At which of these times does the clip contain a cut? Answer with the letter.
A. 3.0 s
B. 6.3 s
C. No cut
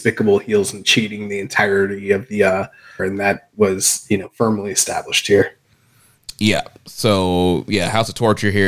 A